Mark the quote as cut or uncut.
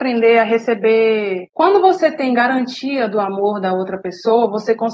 cut